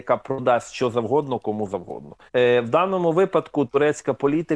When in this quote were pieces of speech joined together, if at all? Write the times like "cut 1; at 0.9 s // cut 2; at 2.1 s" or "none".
cut 1; at 2.3 s